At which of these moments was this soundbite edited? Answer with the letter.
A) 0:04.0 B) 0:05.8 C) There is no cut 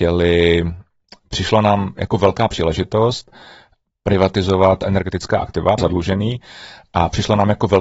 B